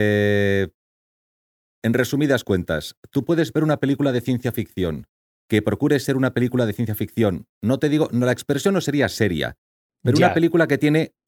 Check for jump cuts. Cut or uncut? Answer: uncut